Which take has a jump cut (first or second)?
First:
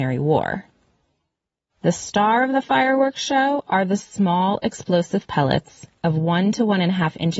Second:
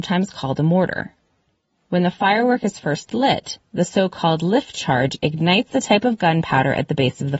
first